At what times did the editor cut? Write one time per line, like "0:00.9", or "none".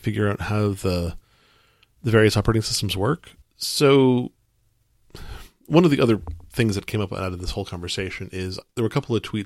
0:03.4